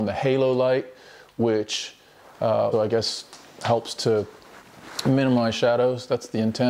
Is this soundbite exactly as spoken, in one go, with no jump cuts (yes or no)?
no